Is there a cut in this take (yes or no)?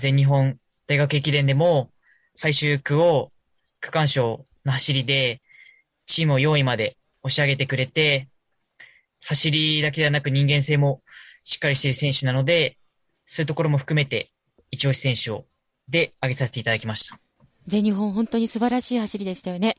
no